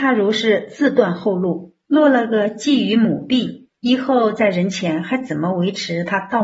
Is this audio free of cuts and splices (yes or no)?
no